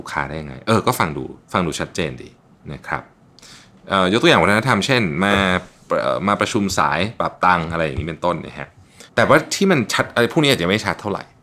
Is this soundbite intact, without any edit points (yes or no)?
no